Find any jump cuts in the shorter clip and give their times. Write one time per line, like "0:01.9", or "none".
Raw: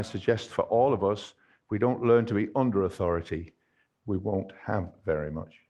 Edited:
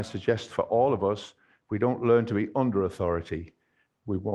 none